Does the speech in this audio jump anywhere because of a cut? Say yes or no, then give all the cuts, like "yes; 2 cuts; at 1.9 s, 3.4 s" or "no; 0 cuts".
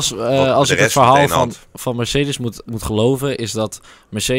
yes; 1 cut; at 2.7 s